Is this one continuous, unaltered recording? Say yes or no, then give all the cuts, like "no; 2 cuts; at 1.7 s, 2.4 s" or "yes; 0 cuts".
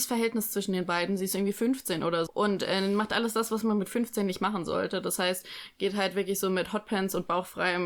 no; 1 cut; at 2.3 s